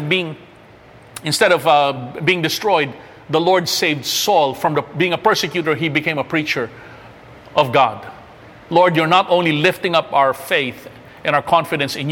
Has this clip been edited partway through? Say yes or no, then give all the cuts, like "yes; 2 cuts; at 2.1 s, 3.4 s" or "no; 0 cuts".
yes; 1 cut; at 8.7 s